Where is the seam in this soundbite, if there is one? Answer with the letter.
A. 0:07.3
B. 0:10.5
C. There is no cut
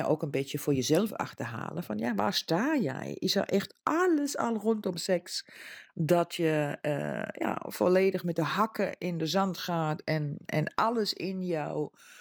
B